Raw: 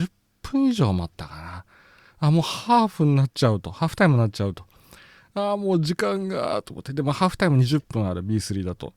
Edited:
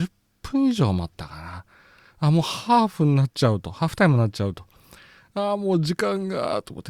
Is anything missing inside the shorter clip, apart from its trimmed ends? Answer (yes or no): no